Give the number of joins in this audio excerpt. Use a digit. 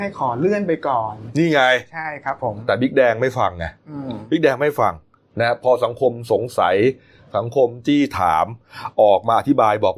0